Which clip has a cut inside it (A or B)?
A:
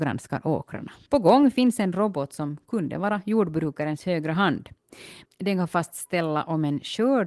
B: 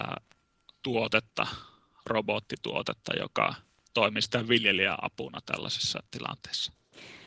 A